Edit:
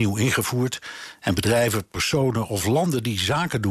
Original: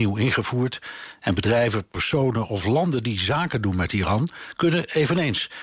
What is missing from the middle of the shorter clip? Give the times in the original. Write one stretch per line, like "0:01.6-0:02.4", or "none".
none

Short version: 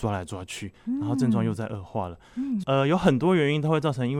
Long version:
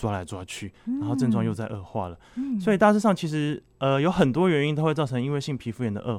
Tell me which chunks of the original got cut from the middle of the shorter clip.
0:02.6-0:03.8

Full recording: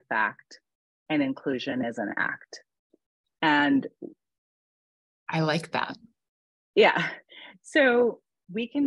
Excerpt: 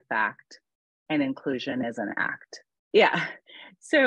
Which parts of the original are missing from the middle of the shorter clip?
0:02.8-0:06.7

